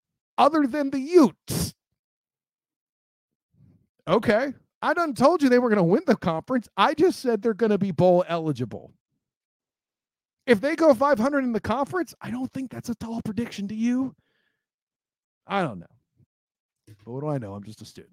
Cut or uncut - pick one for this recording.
uncut